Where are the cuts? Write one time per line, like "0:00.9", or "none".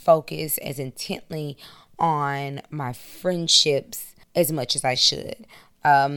0:04.2